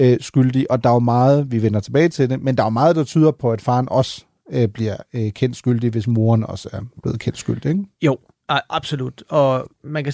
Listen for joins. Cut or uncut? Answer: uncut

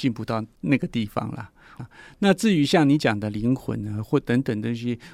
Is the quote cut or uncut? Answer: cut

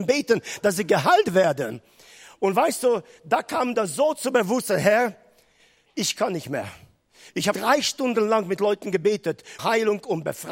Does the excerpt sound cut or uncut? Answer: cut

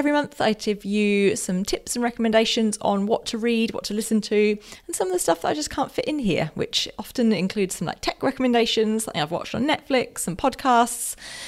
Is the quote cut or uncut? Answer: uncut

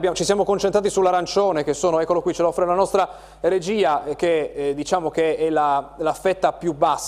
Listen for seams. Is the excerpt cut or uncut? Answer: uncut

